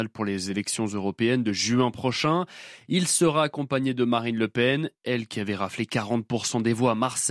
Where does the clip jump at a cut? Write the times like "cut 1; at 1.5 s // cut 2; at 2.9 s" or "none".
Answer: none